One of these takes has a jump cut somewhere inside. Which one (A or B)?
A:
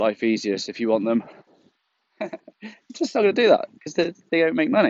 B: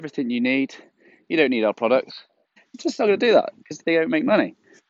B